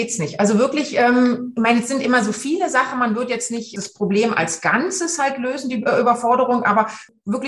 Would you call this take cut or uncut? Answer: uncut